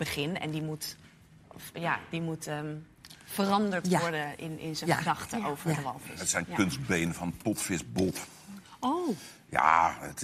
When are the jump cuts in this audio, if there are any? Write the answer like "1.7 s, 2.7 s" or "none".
none